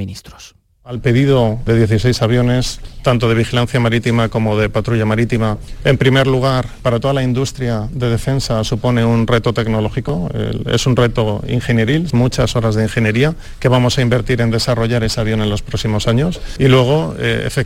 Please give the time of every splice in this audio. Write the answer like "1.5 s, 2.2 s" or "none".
12.1 s